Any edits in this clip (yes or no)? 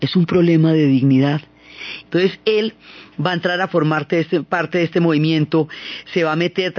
yes